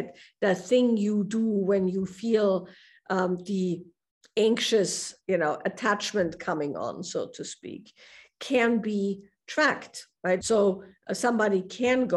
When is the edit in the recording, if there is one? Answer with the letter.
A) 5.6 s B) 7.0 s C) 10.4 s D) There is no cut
C